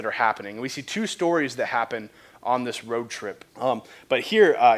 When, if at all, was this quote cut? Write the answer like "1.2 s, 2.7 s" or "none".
3.5 s